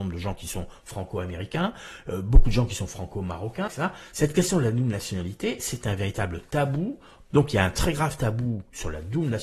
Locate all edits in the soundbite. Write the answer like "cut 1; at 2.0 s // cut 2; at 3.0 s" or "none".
cut 1; at 3.7 s // cut 2; at 7.3 s